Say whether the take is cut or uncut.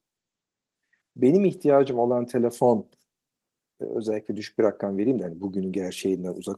uncut